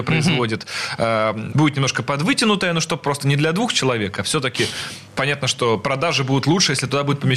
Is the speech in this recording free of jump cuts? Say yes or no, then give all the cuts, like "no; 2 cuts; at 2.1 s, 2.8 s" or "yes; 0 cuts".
no; 1 cut; at 1.5 s